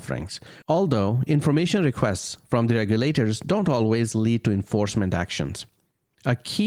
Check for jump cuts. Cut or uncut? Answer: uncut